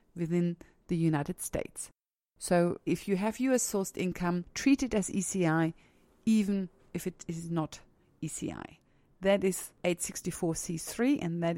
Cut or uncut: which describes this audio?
cut